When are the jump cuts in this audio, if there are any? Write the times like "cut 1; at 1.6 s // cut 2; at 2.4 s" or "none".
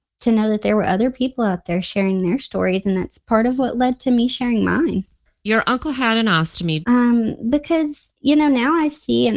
cut 1; at 6.8 s